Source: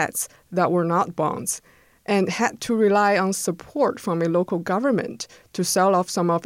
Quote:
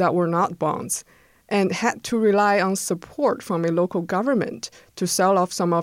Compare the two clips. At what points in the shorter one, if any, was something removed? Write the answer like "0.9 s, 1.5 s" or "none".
none